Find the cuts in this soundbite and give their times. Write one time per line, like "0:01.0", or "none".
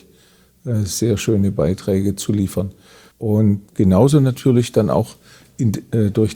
0:03.1